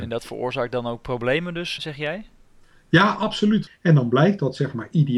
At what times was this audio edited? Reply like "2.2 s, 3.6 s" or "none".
1.8 s, 3.7 s